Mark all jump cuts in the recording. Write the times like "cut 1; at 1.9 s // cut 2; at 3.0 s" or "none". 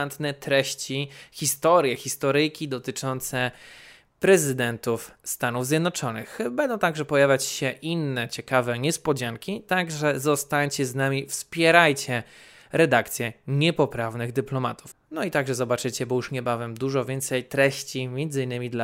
cut 1; at 14.9 s